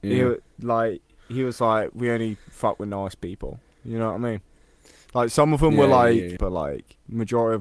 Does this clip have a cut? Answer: yes; 1 cut; at 6.4 s

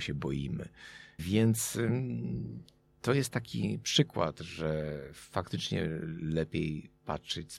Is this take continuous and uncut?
no; 1 cut; at 1.2 s

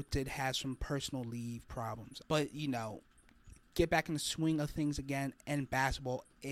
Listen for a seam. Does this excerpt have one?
yes; 2 cuts; at 2.2 s, 3.6 s

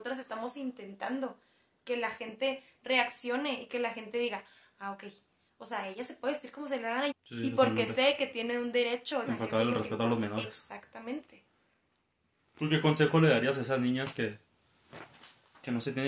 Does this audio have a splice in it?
yes; 2 cuts; at 7.1 s, 9.3 s

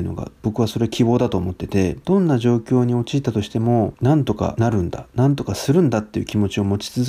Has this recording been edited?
no; 0 cuts

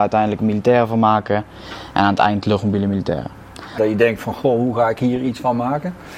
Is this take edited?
yes; 1 cut; at 3.8 s

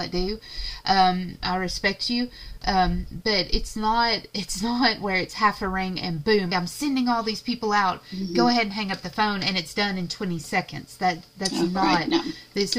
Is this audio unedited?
no; 1 cut; at 6.5 s

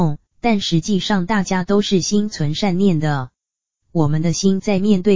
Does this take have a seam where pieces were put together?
yes; 1 cut; at 3.8 s

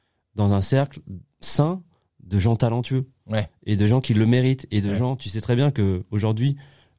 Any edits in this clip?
no; 0 cuts

